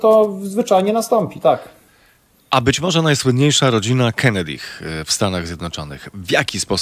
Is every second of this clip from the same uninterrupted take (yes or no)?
yes